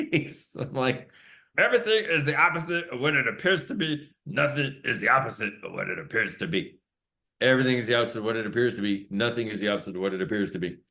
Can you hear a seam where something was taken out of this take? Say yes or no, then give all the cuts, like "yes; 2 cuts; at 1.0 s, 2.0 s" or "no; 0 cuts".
yes; 2 cuts; at 1.5 s, 7.2 s